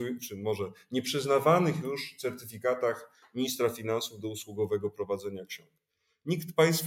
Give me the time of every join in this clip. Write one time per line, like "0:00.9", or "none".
none